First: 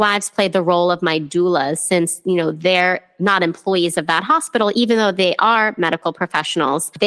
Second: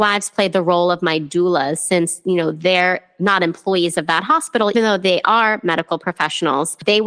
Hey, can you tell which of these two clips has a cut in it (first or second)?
second